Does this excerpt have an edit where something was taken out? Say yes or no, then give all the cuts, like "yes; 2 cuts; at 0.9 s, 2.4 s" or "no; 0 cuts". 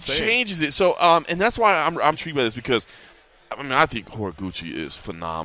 yes; 1 cut; at 2.1 s